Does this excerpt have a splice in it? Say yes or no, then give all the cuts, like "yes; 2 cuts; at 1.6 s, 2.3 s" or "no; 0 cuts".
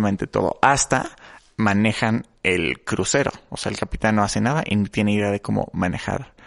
no; 0 cuts